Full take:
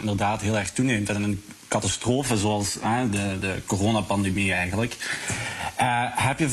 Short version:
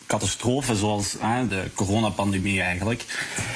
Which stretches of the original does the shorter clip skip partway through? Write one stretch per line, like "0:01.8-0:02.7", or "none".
0:03.1-0:03.4